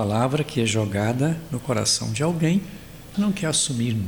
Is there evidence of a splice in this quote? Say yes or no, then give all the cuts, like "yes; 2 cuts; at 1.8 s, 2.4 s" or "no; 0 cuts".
yes; 1 cut; at 3.1 s